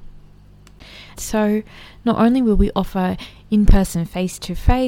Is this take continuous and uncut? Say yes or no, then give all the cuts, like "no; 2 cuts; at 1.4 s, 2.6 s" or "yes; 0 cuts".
no; 1 cut; at 1.2 s